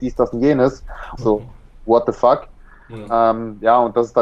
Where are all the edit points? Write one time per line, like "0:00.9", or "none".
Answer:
0:01.2